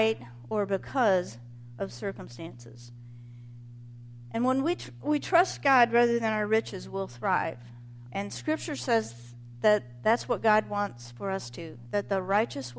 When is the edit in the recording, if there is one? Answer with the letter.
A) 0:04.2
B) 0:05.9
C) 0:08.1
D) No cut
C